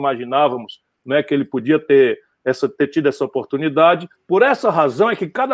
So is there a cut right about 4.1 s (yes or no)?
yes